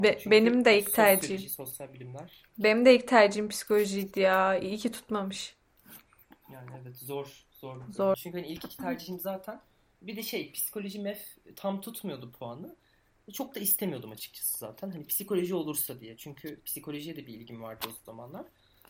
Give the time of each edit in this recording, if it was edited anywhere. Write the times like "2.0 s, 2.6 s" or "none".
2.5 s, 8.1 s

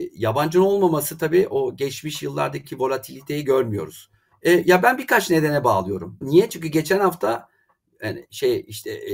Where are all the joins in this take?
4.3 s, 6.2 s

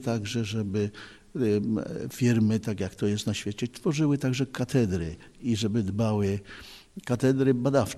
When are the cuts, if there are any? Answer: none

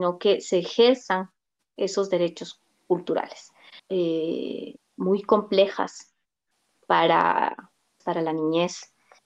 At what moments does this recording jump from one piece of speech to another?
3.8 s, 8.0 s

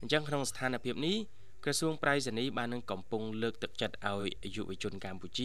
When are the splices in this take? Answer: none

